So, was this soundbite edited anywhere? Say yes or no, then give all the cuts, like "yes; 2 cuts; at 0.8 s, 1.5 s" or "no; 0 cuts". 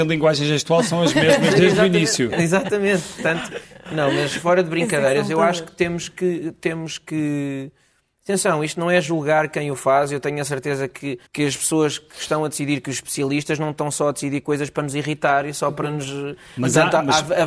yes; 1 cut; at 11.3 s